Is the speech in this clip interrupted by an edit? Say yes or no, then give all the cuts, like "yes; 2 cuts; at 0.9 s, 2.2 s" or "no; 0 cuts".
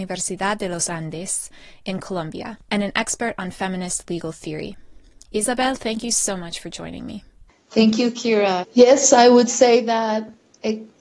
yes; 1 cut; at 8.6 s